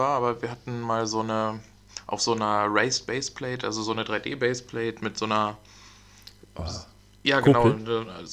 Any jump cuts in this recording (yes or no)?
no